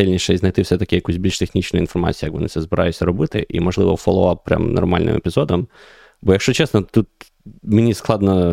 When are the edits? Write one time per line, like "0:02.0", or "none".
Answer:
none